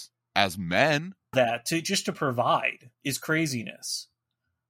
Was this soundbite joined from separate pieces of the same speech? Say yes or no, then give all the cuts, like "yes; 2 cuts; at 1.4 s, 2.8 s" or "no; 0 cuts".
yes; 2 cuts; at 1.3 s, 2.9 s